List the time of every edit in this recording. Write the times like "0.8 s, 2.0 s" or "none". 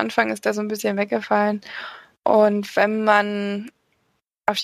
none

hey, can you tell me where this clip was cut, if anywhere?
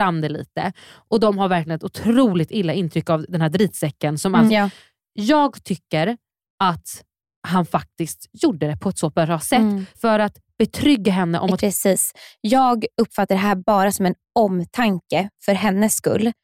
4.5 s, 9.9 s, 11.6 s

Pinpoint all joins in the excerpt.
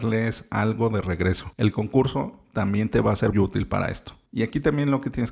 3.3 s

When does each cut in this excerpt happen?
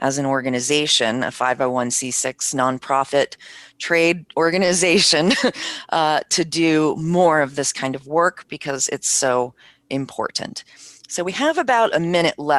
none

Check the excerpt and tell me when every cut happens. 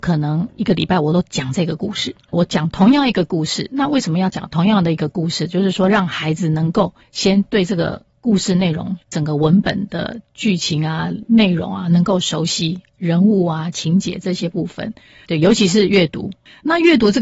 15.2 s

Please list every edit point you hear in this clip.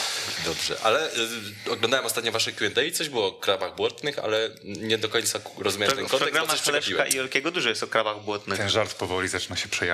none

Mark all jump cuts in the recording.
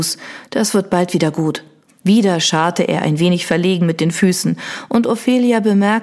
1.9 s

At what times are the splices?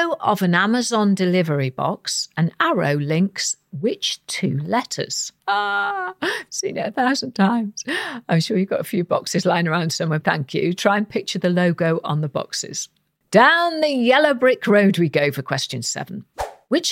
5.4 s, 10.2 s

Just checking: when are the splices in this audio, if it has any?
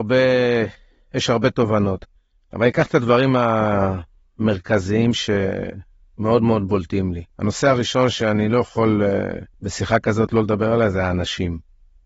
7.3 s, 9.5 s

